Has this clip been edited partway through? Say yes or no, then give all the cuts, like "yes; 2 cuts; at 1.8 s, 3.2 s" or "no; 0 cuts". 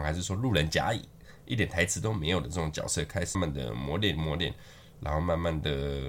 yes; 1 cut; at 3.3 s